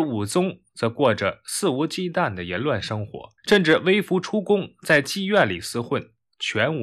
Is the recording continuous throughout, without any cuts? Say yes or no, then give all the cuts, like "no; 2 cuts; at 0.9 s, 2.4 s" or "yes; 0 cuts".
no; 1 cut; at 3.4 s